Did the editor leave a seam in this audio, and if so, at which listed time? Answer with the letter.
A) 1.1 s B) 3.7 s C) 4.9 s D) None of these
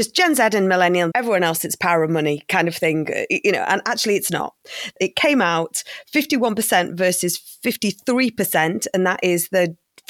A